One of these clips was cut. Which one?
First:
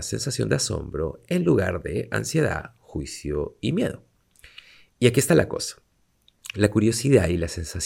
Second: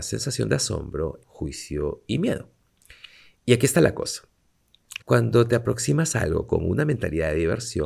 second; 2 cuts; at 1.2 s, 5.0 s

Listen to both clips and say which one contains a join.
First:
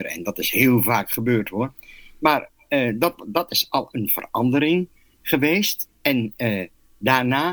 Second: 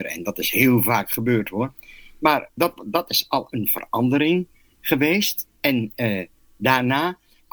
second; 1 cut; at 2.6 s

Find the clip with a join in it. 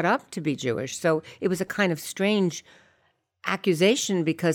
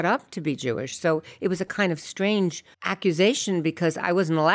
second; 1 cut; at 2.7 s

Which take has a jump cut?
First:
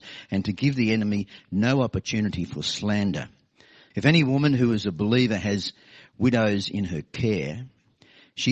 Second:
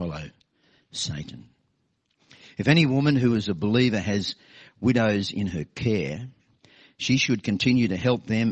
first; 1 cut; at 3.9 s

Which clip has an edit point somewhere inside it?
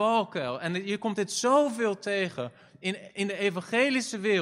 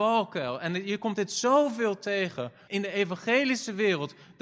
second; 1 cut; at 2.7 s

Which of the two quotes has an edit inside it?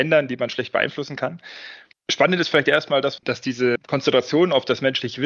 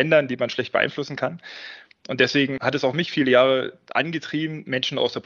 first; 2 cuts; at 1.9 s, 3.2 s

